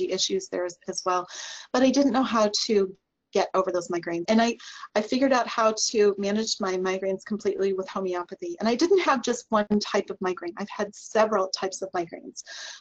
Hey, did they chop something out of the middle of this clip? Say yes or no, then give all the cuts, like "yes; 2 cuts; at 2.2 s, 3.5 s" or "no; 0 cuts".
yes; 1 cut; at 4.2 s